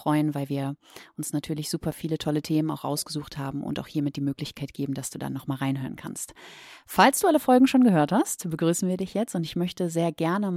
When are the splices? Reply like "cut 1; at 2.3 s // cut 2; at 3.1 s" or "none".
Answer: none